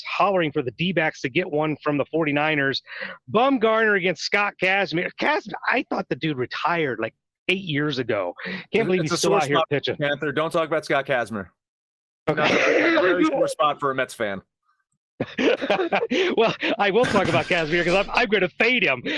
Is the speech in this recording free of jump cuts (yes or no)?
yes